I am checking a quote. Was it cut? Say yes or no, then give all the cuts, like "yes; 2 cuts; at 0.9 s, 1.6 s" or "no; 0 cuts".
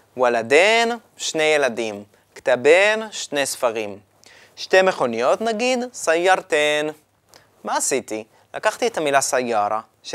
no; 0 cuts